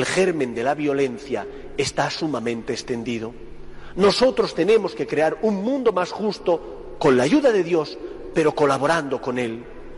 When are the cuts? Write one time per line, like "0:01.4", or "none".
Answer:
none